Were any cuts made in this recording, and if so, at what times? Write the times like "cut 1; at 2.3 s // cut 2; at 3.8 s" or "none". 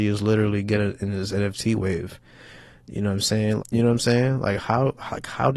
cut 1; at 3.6 s